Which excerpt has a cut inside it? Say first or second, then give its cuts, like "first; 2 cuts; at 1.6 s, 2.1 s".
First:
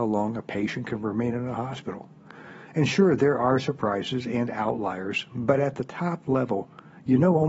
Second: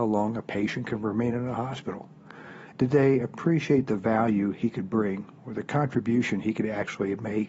second; 1 cut; at 2.7 s